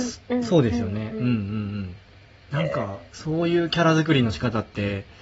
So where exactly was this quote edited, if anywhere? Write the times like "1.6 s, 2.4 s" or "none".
none